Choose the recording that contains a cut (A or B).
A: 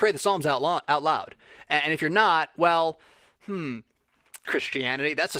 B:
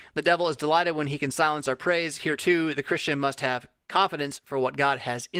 A